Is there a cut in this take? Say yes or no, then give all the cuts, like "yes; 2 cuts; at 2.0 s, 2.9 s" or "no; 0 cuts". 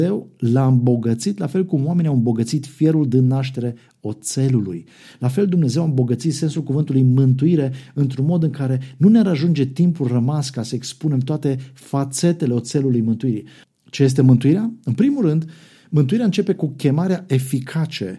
yes; 1 cut; at 13.6 s